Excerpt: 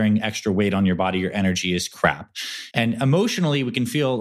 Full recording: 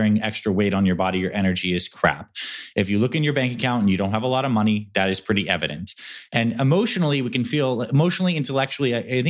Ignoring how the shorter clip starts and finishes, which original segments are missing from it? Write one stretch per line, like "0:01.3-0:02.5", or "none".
0:02.7-0:06.3